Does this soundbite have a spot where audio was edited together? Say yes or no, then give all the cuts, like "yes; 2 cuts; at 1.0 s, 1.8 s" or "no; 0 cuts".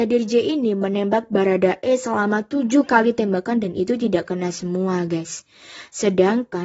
no; 0 cuts